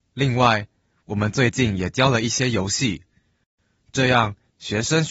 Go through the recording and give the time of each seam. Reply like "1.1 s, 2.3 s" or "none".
none